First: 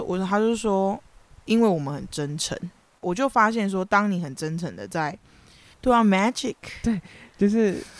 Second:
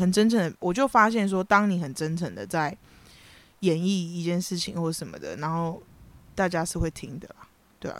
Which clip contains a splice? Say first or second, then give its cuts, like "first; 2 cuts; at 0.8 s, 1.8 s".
first; 2 cuts; at 3.0 s, 5.7 s